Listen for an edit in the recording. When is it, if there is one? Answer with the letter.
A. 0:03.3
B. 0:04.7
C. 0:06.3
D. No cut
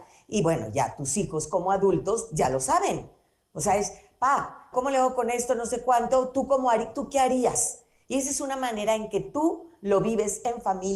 B